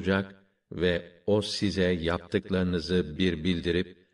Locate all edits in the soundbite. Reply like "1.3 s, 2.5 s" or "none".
3.2 s